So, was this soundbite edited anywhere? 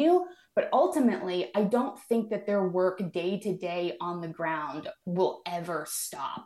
no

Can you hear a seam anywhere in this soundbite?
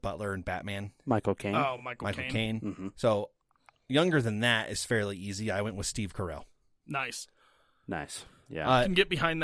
no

